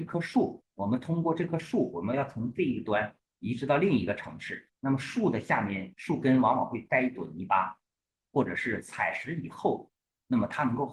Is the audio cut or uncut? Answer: cut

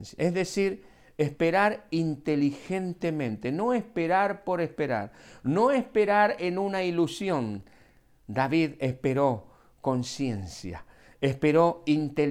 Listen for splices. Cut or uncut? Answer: uncut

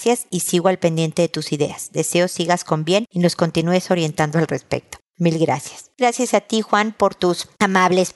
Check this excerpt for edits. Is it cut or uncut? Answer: uncut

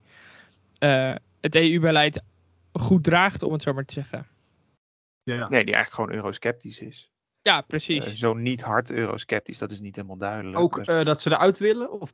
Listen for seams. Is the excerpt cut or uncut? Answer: uncut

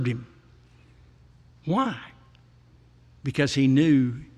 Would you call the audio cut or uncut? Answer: uncut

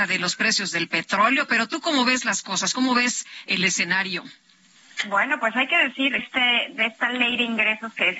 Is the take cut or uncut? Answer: cut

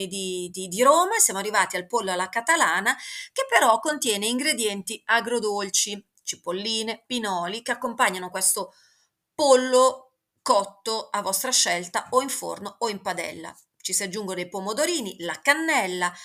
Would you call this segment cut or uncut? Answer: cut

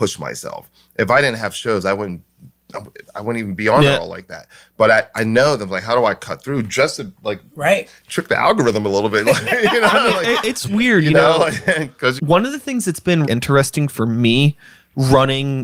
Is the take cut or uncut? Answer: cut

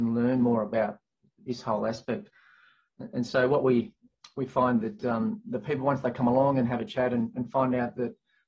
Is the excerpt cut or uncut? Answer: uncut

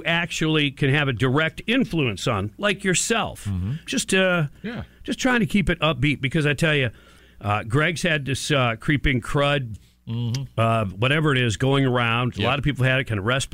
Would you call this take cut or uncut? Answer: cut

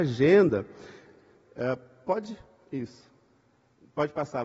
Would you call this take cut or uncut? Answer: uncut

